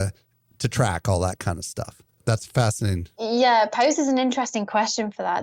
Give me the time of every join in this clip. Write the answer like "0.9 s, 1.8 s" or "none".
none